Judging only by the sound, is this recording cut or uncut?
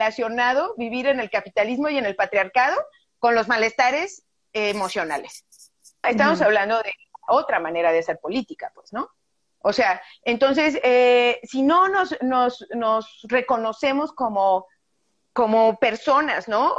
cut